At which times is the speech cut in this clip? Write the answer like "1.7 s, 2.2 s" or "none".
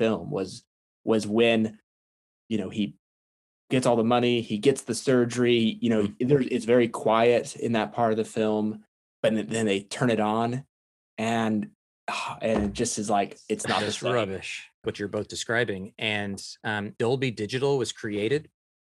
14.8 s, 17.0 s